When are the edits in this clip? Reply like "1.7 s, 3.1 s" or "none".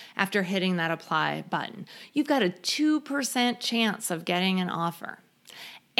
none